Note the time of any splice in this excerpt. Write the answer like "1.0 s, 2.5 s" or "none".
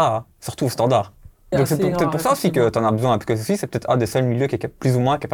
1.5 s